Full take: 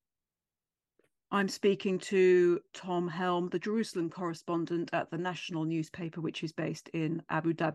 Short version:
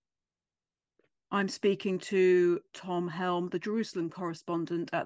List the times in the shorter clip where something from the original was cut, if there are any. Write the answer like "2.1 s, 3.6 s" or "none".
none